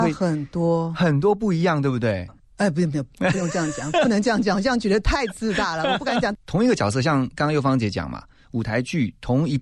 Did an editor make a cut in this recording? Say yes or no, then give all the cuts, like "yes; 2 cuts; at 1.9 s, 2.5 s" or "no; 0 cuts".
yes; 2 cuts; at 2.3 s, 6.3 s